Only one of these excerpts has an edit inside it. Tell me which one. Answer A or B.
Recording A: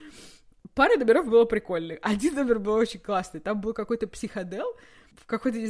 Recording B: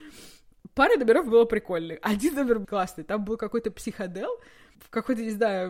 B